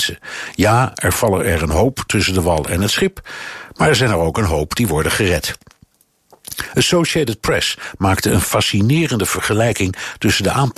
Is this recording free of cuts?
yes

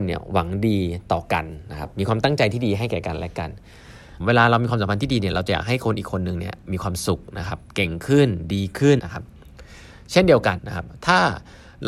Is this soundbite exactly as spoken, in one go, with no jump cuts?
no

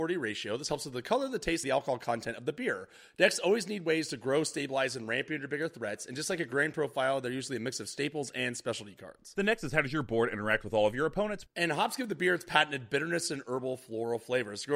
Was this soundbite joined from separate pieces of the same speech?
yes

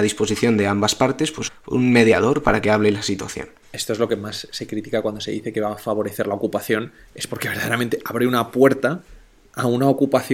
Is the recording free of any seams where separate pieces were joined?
no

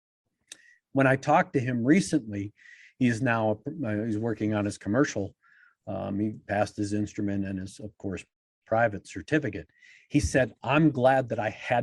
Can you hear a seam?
no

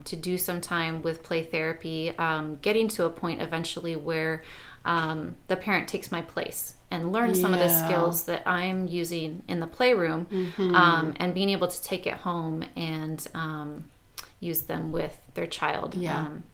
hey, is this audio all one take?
yes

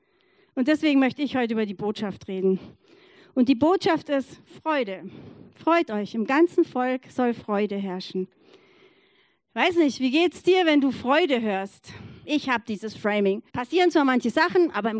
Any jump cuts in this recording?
yes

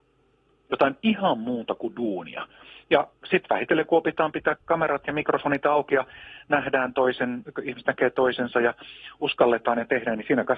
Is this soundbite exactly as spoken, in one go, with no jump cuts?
yes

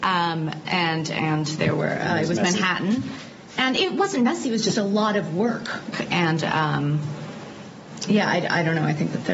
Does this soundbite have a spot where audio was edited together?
yes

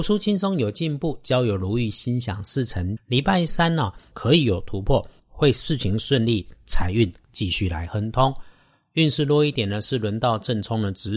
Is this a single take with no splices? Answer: no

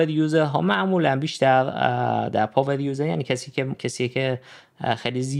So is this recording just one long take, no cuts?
no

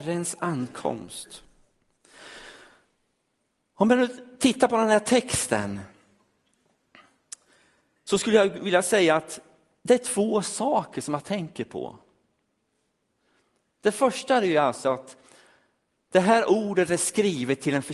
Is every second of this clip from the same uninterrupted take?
yes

